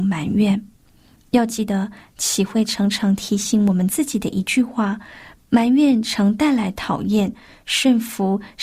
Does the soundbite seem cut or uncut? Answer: uncut